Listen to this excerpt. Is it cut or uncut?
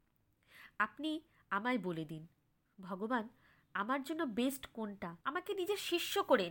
cut